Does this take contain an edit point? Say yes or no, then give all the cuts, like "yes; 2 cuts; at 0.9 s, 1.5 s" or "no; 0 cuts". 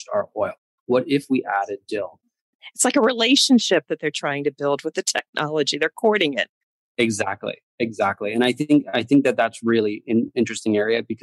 no; 0 cuts